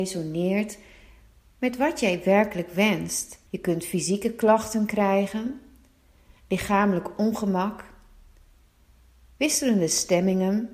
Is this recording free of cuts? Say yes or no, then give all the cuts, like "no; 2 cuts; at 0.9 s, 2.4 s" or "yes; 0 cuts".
no; 1 cut; at 3.5 s